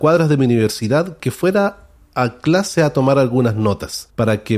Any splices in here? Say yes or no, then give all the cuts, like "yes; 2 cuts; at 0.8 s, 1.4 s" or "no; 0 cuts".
no; 0 cuts